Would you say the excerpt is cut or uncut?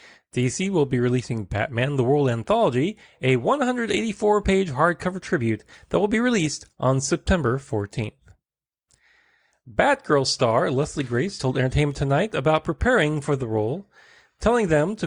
uncut